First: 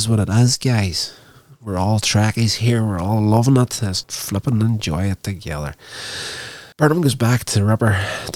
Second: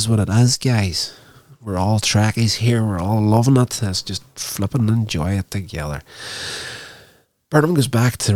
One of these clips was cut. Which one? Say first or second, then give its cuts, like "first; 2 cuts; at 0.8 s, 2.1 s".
first; 2 cuts; at 4.0 s, 6.7 s